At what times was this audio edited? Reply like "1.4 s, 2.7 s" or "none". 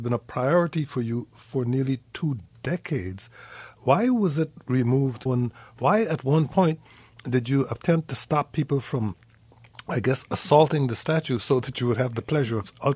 5.3 s